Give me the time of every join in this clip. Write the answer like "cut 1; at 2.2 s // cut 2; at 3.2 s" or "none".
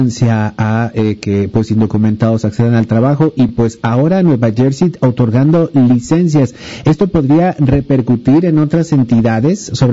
none